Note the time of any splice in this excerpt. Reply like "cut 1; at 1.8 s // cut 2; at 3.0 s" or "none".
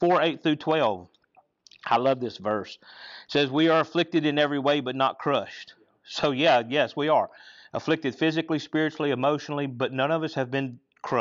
none